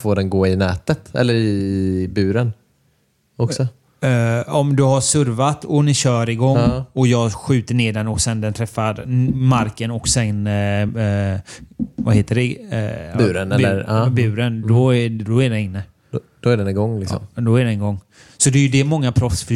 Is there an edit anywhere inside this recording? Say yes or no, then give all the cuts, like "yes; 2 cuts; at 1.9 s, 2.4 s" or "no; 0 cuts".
no; 0 cuts